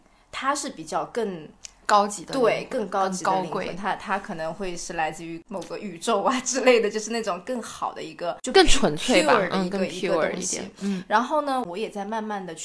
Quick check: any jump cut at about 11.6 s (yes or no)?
yes